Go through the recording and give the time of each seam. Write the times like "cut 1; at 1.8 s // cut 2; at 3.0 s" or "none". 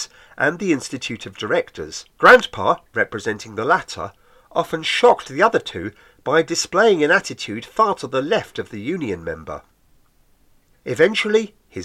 cut 1; at 2.1 s